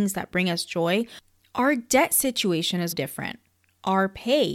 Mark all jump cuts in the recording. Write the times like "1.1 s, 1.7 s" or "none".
2.9 s